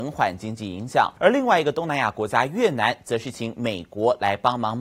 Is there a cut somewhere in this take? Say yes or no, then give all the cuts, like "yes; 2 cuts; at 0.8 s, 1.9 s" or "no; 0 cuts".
yes; 1 cut; at 1.2 s